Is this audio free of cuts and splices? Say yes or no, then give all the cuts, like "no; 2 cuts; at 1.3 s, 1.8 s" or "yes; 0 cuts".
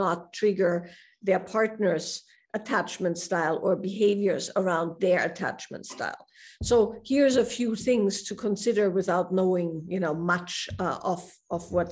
yes; 0 cuts